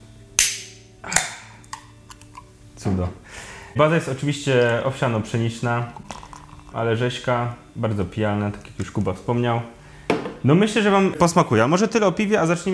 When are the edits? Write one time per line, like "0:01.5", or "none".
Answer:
0:06.7